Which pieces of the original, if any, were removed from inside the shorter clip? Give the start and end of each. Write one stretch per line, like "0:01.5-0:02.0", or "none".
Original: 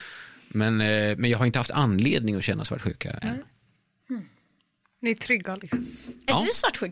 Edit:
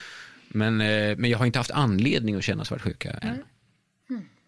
none